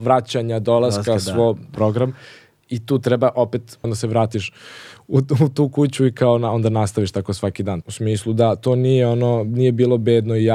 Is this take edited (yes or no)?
yes